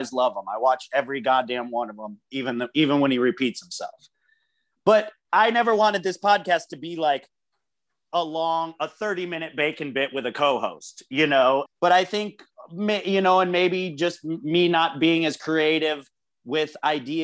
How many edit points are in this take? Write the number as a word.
one